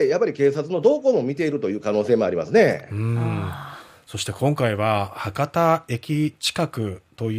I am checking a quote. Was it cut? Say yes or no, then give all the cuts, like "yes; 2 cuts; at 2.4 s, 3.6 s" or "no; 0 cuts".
no; 0 cuts